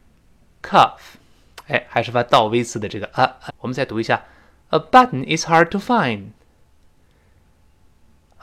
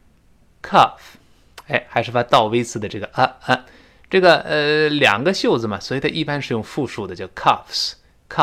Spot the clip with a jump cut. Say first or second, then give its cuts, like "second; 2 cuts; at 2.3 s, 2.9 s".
first; 1 cut; at 3.5 s